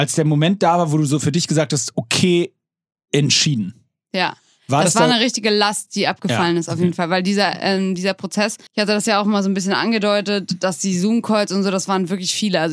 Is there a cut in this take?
yes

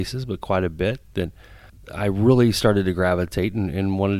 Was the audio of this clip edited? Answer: no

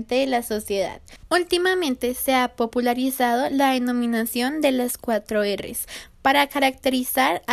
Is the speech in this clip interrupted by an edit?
yes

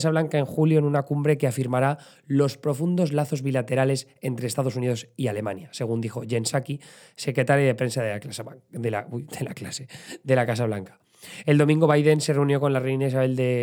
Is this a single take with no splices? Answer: yes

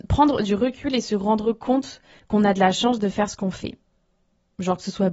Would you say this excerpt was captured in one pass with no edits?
yes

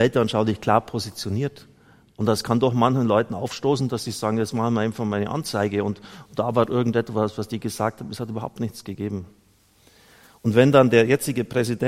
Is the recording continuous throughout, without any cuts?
yes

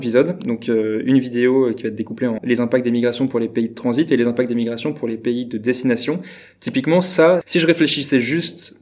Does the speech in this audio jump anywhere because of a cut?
yes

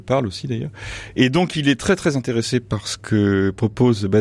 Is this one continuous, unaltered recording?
yes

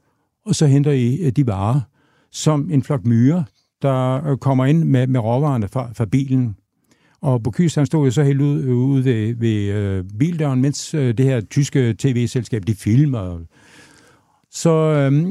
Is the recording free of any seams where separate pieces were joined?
yes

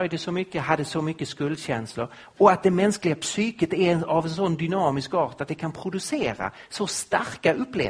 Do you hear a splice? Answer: no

